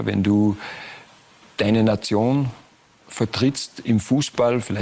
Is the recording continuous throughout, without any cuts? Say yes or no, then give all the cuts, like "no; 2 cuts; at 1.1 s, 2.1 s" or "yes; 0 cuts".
yes; 0 cuts